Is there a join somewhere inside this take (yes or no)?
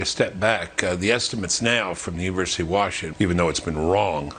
yes